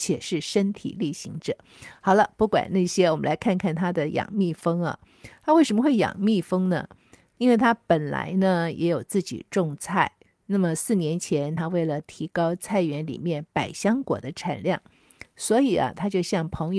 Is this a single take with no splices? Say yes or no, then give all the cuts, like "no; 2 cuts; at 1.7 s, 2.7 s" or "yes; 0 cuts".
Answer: yes; 0 cuts